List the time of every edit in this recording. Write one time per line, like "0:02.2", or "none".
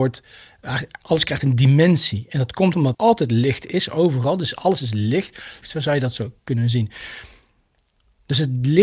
0:02.9
0:05.6